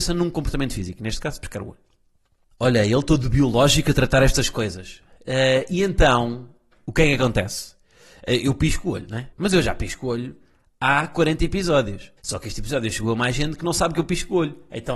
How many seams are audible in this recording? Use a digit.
2